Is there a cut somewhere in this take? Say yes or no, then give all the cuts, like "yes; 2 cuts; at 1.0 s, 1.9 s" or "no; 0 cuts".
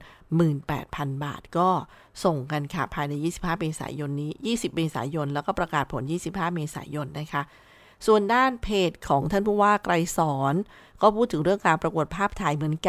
no; 0 cuts